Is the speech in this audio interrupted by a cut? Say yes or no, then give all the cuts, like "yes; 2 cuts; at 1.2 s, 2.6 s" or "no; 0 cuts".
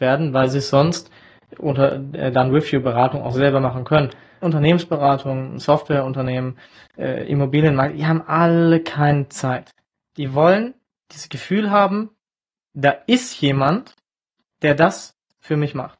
yes; 1 cut; at 4.4 s